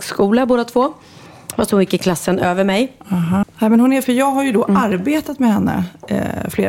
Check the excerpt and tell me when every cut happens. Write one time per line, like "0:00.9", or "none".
0:03.4